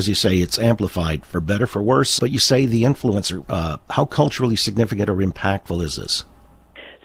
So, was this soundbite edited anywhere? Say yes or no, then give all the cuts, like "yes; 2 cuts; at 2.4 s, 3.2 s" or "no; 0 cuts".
yes; 2 cuts; at 2.2 s, 3.4 s